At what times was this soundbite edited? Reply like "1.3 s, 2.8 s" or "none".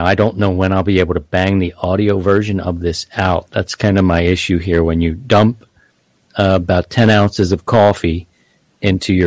none